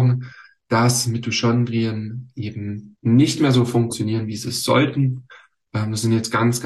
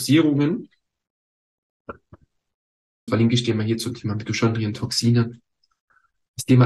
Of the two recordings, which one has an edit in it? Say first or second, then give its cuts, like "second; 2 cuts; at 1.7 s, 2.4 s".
second; 1 cut; at 3.1 s